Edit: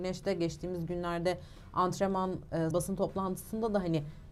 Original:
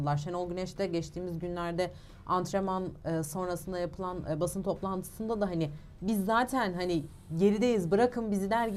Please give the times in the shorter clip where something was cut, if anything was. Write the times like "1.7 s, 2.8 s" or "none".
2.7 s